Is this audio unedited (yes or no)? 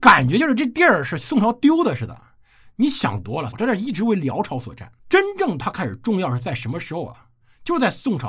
no